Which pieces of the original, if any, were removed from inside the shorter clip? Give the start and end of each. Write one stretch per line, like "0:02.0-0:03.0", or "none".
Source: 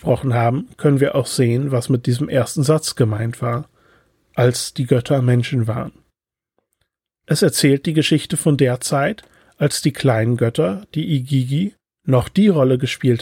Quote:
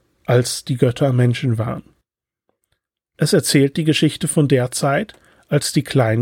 none

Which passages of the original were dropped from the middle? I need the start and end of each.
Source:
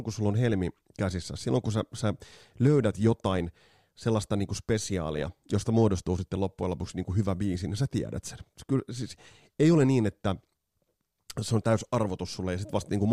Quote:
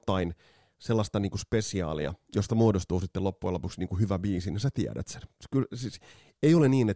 none

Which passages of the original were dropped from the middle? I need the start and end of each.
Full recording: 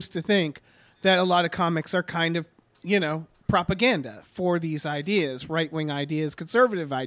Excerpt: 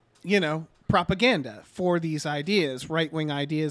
none

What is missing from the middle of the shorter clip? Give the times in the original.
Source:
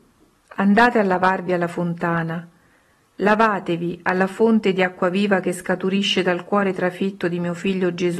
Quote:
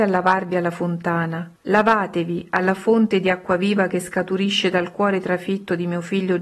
0:02.5-0:03.1

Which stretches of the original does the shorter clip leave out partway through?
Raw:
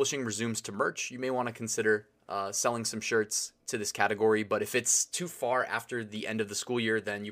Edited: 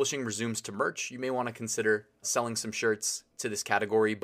0:02.2-0:02.5

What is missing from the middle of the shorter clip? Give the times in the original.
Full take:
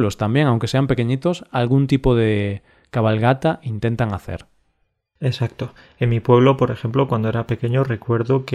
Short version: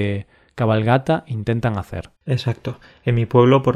0:04.5-0:05.1

